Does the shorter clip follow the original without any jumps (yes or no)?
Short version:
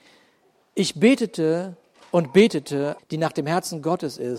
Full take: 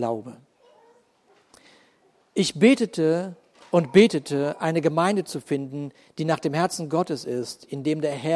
no